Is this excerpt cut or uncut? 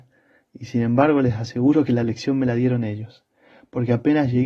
uncut